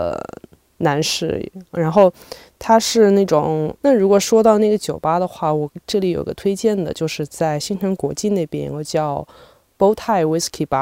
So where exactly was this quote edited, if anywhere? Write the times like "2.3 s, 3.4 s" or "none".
3.8 s